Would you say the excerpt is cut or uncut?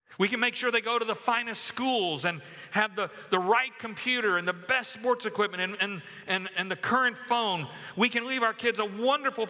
uncut